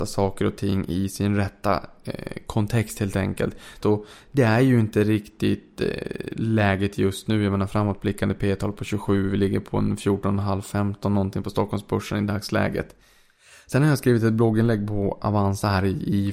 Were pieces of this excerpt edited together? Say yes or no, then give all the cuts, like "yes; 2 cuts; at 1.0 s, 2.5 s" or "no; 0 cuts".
yes; 1 cut; at 3.8 s